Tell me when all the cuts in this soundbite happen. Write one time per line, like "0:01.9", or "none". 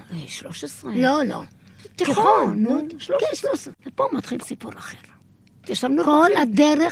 0:03.7
0:05.6